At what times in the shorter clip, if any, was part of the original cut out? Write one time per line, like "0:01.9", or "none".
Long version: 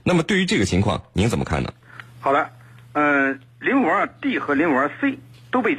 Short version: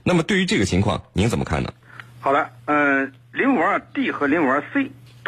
0:02.6